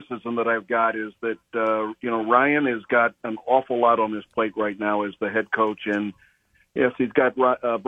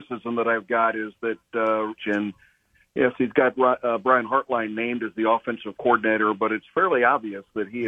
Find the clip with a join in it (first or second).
second